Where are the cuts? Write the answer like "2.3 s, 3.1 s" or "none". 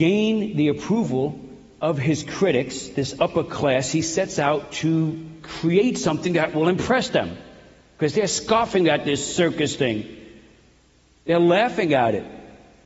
none